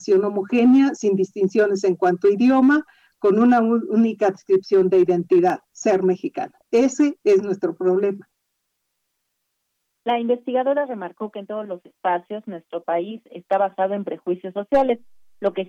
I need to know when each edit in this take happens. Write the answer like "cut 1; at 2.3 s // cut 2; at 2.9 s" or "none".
none